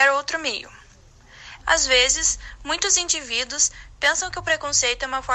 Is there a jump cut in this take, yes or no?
yes